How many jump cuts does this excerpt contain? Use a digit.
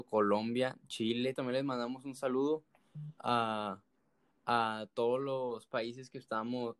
1